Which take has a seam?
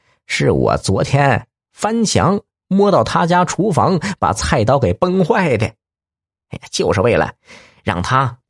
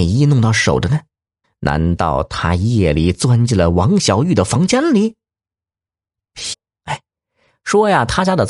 second; 2 cuts; at 1.4 s, 6.5 s

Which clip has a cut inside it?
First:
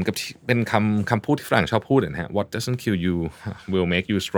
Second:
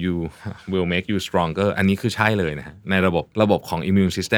second; 1 cut; at 3.3 s

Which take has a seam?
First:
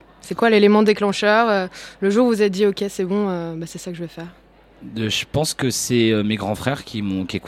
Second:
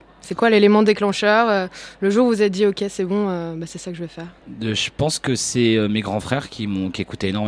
second; 1 cut; at 4.4 s

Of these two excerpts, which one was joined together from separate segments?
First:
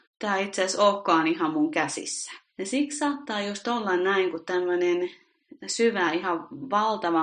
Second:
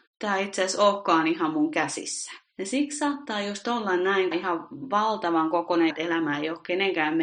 second; 2 cuts; at 4.3 s, 5.9 s

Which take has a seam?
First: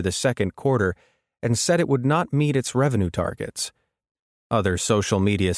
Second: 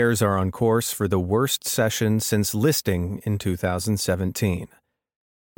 first; 1 cut; at 4.3 s

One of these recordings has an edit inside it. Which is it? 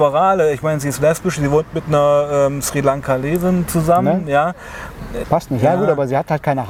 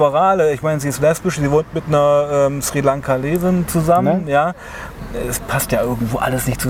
first; 1 cut; at 5.2 s

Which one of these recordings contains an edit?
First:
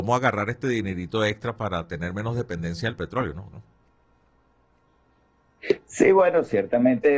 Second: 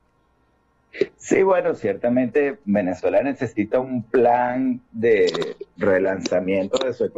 first; 1 cut; at 3.5 s

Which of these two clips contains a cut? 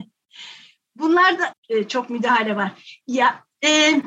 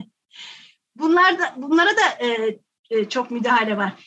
first; 1 cut; at 1.5 s

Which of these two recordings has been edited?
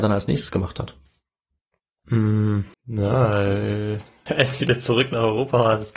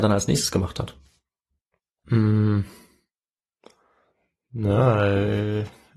first; 2 cuts; at 2.7 s, 4.3 s

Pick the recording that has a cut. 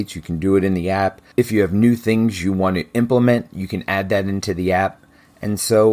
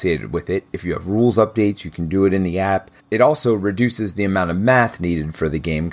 second; 1 cut; at 3.0 s

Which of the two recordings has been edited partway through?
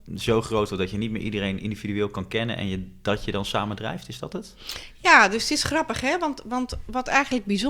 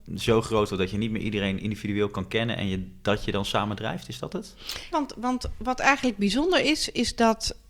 second; 1 cut; at 4.9 s

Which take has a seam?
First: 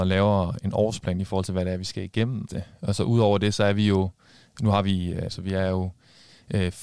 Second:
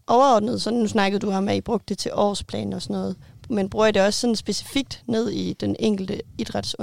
first; 2 cuts; at 2.5 s, 5.3 s

